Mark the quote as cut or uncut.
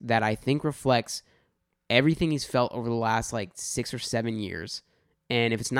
uncut